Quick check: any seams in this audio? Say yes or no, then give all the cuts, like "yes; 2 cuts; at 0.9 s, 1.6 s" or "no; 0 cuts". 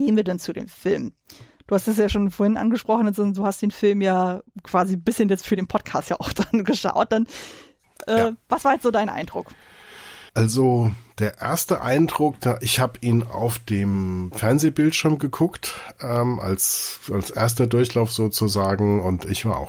yes; 1 cut; at 10.3 s